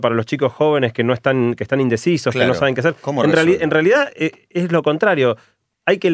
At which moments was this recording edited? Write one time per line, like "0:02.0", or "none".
none